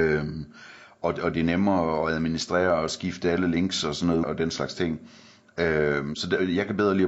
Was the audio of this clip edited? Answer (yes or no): yes